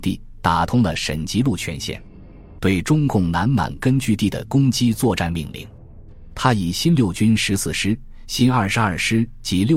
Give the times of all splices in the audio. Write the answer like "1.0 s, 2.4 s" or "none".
2.6 s